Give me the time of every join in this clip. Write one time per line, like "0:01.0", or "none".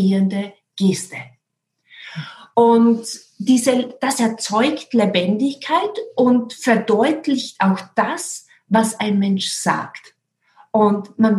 none

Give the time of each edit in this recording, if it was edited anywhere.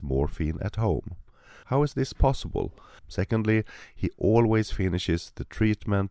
0:01.6
0:03.0

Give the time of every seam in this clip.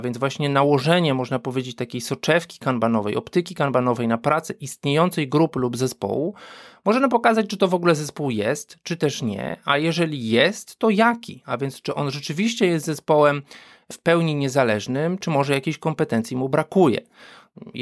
none

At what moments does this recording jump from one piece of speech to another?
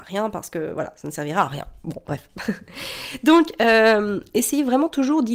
none

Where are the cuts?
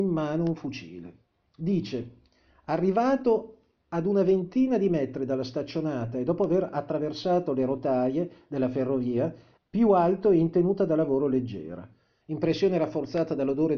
0:09.6
0:12.2

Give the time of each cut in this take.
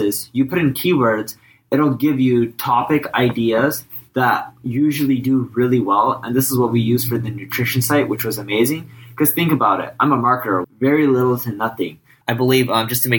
0:10.6
0:12.2

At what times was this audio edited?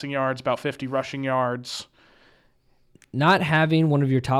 none

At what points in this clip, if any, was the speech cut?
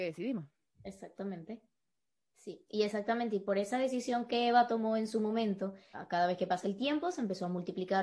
0:02.3
0:05.9

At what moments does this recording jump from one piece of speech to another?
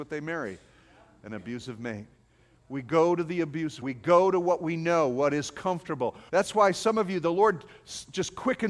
0:03.8
0:06.3

